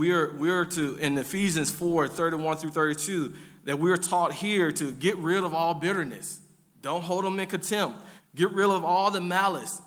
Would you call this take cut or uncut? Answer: cut